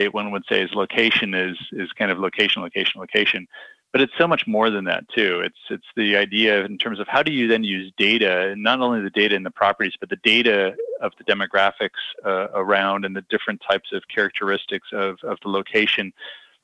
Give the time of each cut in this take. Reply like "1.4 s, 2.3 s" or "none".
none